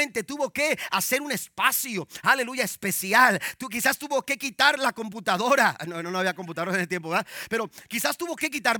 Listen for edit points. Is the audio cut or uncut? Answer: uncut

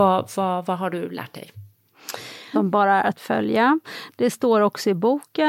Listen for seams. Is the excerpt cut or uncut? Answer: cut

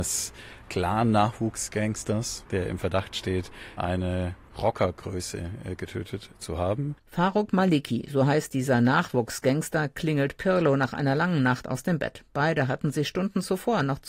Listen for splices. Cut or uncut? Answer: uncut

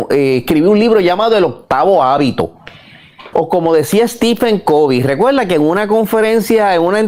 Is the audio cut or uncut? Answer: cut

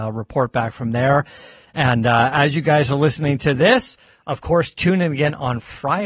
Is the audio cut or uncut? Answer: uncut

